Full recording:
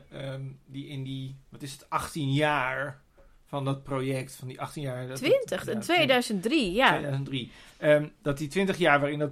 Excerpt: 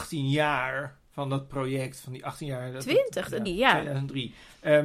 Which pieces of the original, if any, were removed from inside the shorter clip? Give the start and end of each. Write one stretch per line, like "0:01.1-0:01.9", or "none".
0:03.1-0:03.4
0:05.8-0:06.6